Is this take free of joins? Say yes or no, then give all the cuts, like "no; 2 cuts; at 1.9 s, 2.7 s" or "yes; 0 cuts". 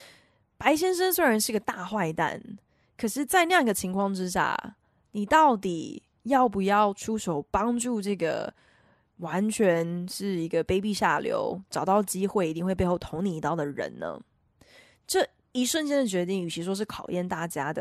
yes; 0 cuts